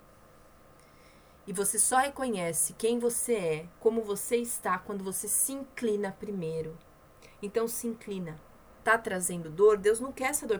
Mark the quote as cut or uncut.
cut